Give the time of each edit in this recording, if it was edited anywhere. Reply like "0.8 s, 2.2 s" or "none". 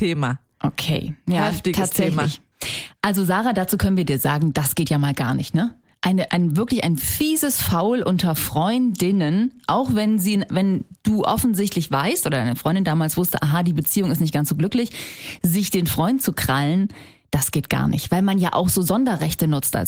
6.3 s